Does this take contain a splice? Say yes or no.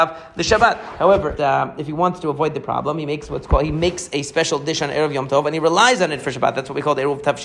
yes